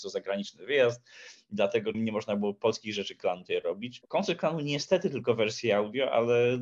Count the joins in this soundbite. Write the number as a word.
two